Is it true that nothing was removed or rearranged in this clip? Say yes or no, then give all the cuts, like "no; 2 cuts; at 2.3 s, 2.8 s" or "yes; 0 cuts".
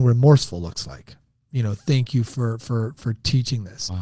no; 1 cut; at 1.3 s